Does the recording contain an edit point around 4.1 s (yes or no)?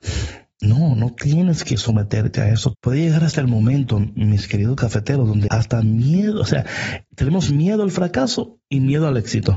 no